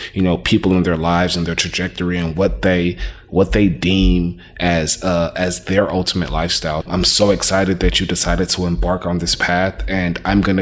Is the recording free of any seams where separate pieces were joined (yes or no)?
no